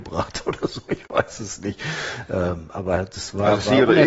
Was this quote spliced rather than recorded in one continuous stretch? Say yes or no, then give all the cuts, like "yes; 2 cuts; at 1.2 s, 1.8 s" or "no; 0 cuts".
no; 0 cuts